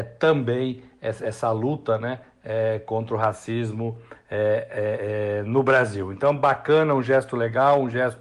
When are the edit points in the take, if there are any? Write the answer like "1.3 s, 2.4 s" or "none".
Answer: none